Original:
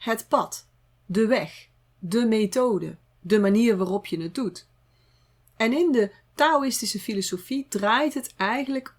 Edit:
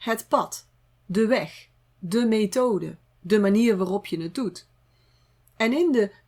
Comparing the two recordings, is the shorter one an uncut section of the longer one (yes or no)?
yes